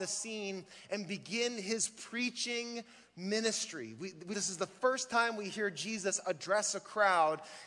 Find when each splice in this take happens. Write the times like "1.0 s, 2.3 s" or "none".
4.3 s